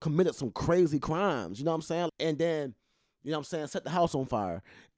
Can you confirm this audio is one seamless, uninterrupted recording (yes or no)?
no